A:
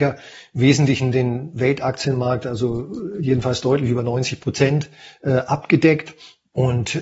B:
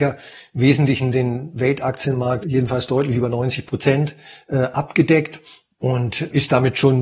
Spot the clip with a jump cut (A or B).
B